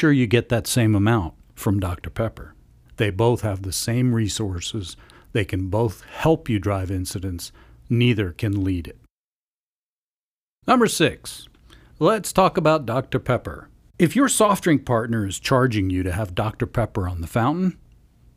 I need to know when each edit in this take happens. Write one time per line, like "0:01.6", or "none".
0:02.9